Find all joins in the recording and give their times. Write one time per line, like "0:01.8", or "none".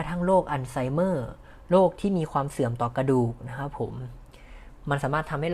none

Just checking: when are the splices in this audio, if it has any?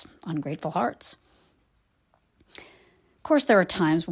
none

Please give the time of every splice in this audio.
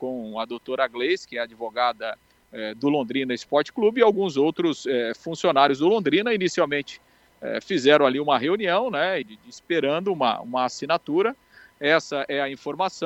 0:09.2

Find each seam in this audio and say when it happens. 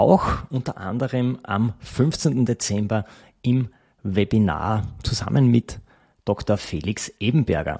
none

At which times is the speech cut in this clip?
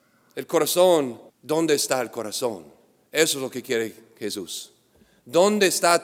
0:01.3

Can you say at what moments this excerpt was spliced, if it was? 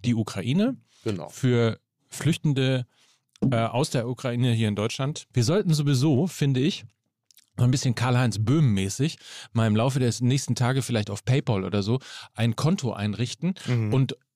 0:05.3

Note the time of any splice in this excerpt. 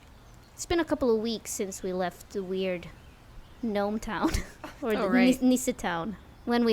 0:04.8

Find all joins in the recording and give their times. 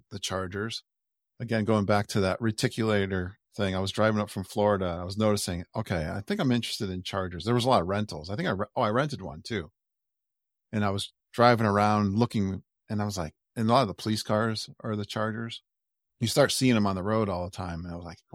0:11.2

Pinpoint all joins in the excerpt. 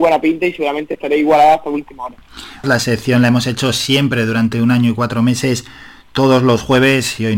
0:02.6

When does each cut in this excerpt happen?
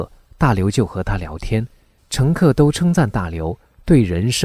0:02.0

